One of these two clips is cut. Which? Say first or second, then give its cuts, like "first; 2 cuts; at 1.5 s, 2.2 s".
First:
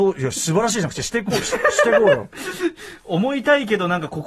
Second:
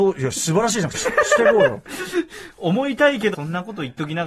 second; 2 cuts; at 0.9 s, 3.3 s